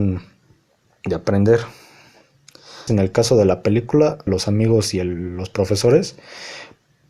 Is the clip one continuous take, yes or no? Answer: no